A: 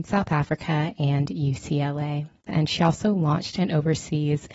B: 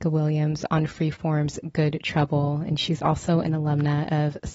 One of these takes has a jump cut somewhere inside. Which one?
A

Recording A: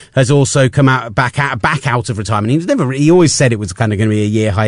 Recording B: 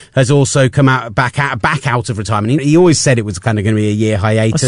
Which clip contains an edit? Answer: B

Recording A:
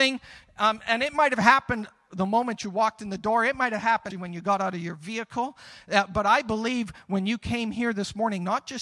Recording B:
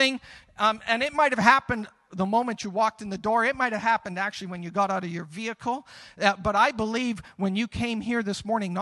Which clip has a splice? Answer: A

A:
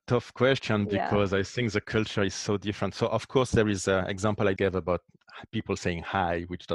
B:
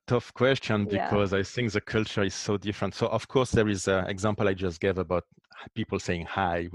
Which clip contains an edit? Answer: A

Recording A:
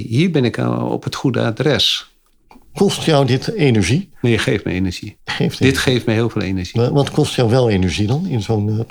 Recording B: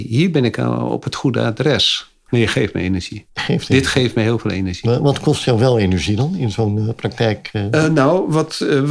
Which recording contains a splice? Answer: B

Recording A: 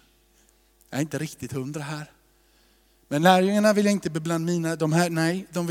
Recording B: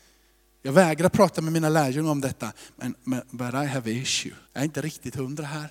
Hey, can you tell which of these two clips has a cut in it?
B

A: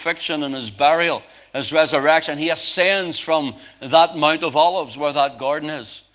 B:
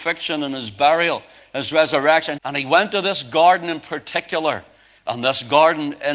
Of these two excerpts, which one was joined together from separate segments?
B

